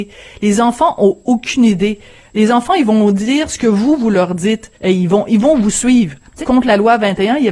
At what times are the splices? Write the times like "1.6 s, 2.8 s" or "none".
4.8 s, 6.4 s